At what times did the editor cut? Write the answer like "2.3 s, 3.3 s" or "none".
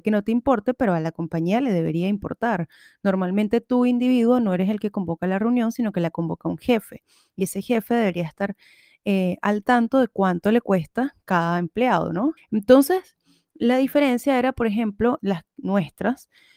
12.4 s, 15.2 s